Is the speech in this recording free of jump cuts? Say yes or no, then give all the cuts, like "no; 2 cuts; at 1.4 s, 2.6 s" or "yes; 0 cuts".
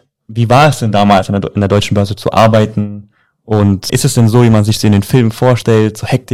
no; 1 cut; at 3.9 s